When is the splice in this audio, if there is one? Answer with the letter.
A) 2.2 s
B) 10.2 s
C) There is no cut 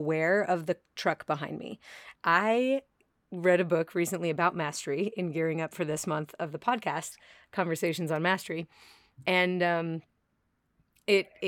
A